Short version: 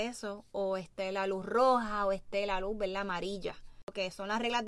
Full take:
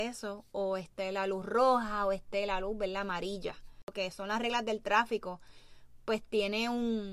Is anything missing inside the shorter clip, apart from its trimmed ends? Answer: no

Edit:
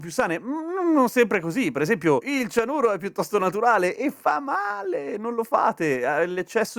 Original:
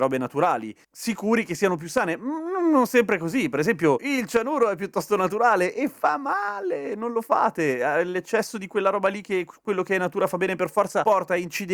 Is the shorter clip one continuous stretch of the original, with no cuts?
yes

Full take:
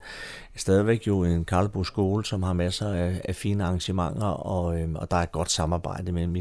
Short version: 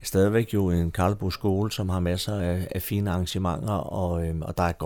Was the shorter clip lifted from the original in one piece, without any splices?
yes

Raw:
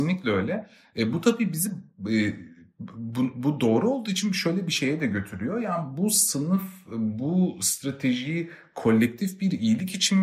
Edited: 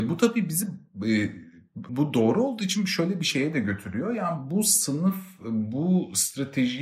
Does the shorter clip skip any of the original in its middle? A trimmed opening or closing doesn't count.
yes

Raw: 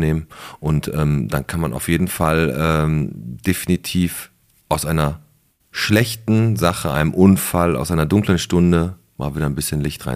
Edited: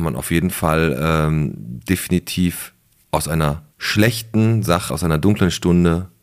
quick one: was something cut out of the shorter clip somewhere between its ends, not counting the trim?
yes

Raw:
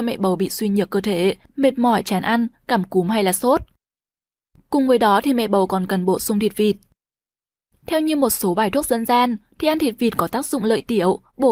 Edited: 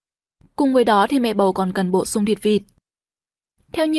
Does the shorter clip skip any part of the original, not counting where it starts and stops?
no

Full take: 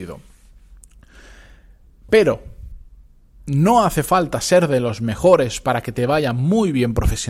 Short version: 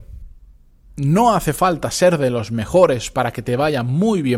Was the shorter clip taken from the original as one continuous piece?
yes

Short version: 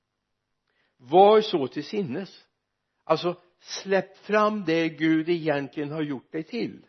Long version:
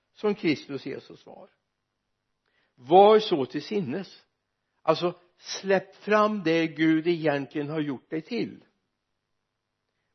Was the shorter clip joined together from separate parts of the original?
no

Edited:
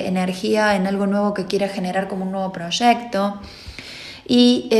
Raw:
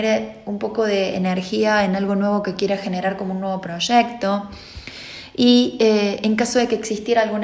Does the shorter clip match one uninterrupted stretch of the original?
yes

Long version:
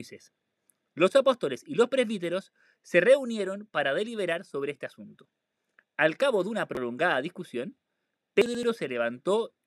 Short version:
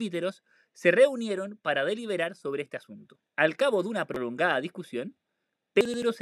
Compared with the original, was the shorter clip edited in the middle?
yes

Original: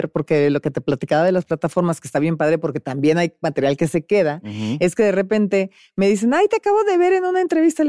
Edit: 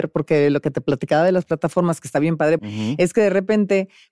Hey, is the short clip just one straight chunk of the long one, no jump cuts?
no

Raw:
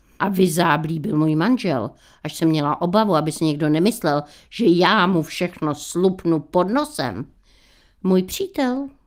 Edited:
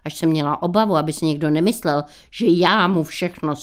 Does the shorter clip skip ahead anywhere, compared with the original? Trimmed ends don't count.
no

